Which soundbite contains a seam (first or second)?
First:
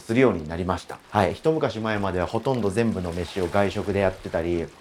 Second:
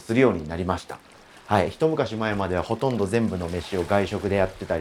first